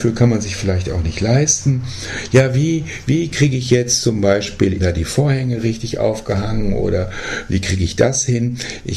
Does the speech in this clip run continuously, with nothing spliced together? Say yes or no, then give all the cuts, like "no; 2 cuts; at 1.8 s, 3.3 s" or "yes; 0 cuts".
no; 1 cut; at 4.8 s